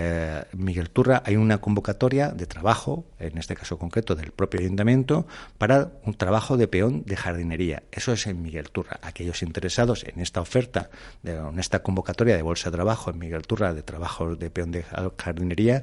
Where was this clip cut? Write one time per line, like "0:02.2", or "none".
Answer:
none